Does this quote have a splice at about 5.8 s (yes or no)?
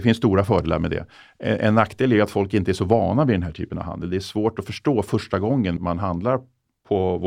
yes